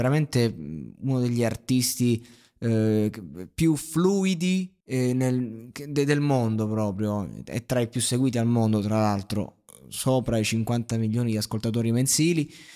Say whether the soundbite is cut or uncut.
cut